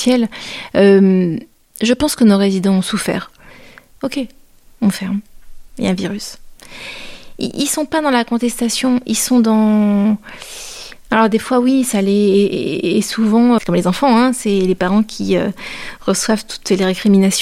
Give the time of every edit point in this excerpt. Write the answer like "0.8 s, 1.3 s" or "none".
4.0 s, 13.6 s